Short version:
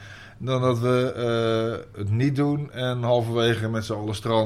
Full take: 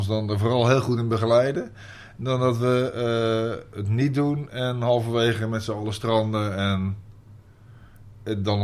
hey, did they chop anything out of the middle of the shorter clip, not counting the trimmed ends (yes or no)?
no